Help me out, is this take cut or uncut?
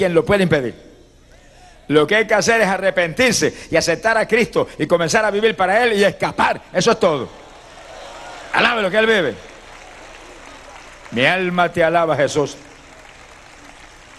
uncut